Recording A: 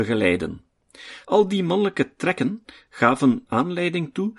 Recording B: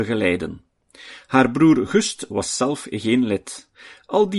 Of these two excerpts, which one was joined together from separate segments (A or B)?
A